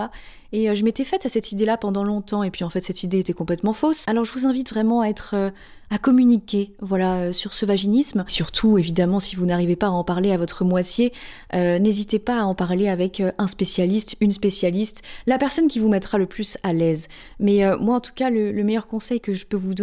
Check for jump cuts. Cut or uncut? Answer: uncut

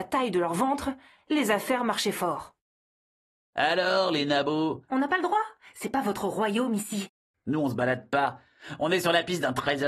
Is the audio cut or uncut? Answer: cut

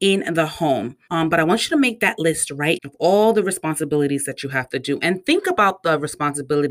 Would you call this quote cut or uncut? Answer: cut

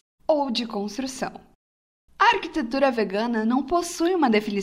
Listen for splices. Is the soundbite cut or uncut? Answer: cut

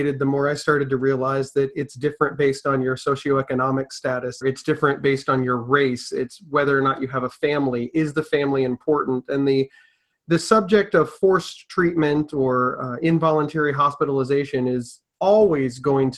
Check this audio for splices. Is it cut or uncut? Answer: cut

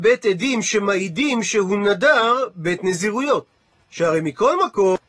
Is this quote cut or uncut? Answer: cut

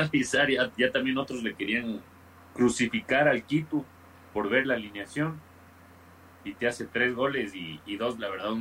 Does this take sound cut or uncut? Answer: uncut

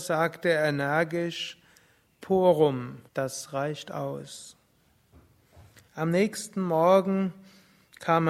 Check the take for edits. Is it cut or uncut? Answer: cut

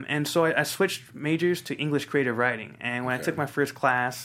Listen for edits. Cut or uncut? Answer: uncut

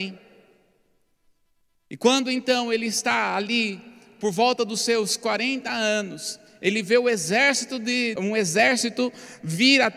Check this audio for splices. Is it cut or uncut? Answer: cut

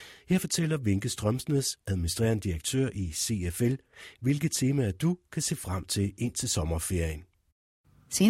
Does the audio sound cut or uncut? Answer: uncut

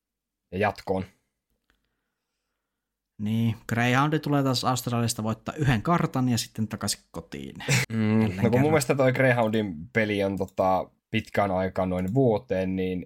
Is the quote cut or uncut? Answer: cut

